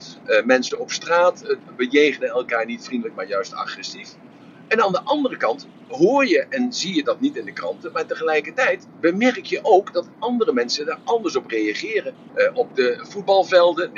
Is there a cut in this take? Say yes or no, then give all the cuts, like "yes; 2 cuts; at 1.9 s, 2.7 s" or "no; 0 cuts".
yes; 2 cuts; at 8.9 s, 12.3 s